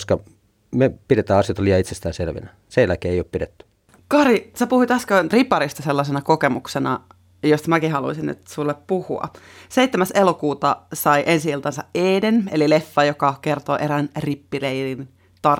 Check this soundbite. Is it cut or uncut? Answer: uncut